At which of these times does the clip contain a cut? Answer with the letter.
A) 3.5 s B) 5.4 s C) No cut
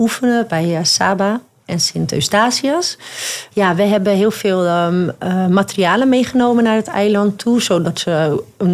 A